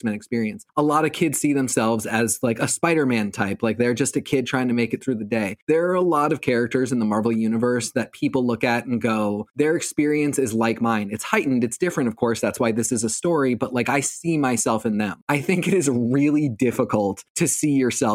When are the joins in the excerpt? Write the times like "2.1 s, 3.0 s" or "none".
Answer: none